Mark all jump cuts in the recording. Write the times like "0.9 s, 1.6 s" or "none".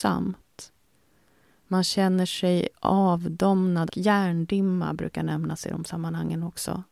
3.9 s